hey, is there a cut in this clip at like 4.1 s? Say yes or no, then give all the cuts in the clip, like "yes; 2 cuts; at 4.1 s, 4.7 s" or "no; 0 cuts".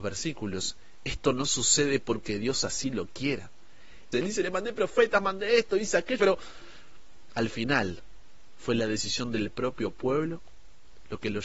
yes; 2 cuts; at 4.1 s, 6.2 s